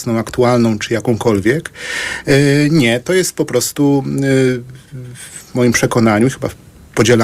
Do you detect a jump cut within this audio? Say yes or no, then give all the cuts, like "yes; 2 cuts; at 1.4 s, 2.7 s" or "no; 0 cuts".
no; 0 cuts